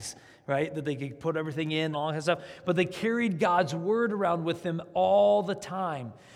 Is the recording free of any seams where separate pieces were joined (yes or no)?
no